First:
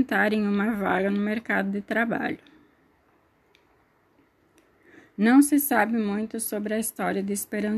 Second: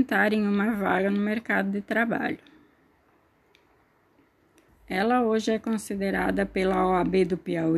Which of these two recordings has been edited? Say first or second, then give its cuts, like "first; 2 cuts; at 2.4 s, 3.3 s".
second; 1 cut; at 4.7 s